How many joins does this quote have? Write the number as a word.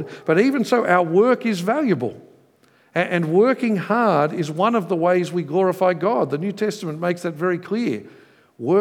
zero